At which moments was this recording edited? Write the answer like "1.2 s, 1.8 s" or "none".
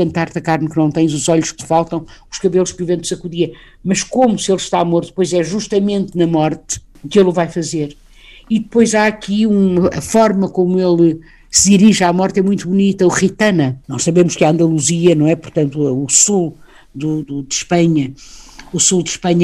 13.8 s, 17.2 s